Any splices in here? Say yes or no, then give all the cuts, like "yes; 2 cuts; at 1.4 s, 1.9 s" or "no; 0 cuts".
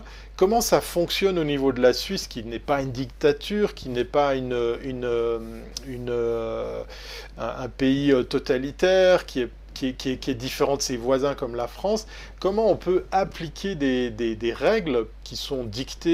no; 0 cuts